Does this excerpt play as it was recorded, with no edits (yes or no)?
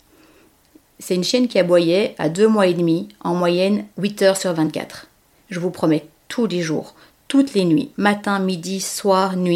no